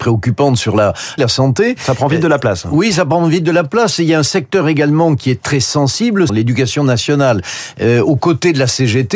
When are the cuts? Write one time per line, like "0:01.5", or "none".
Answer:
0:01.2
0:06.3